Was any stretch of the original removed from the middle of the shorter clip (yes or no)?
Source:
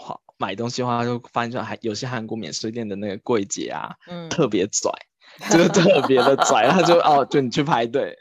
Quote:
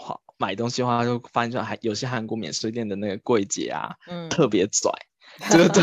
no